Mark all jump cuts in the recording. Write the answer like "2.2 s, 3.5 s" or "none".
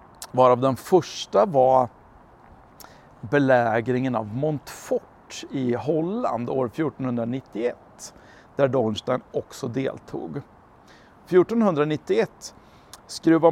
3.2 s